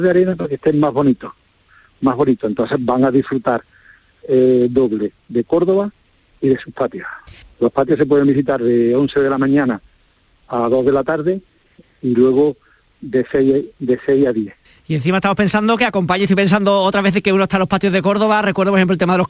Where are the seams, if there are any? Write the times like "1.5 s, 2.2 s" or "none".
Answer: 7.4 s